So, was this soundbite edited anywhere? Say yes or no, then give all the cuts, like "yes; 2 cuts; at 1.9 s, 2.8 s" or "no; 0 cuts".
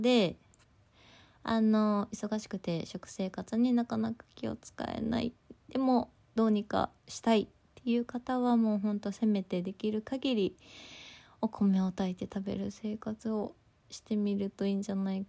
yes; 1 cut; at 7.0 s